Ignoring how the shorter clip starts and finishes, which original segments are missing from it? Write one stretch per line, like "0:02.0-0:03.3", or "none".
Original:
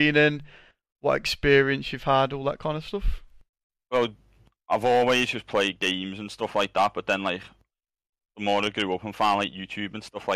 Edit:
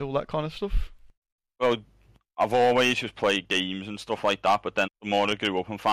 0:07.2-0:08.2